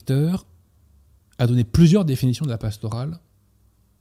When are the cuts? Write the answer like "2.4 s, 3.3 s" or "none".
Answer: none